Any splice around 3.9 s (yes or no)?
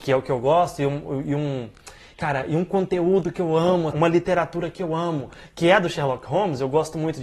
yes